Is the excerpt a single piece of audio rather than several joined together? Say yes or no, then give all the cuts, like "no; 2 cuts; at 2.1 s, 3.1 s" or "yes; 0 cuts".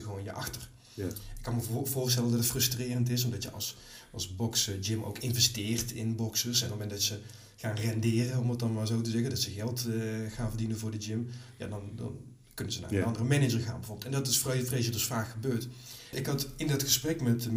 no; 1 cut; at 16.1 s